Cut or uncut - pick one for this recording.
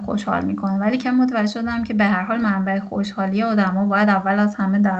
cut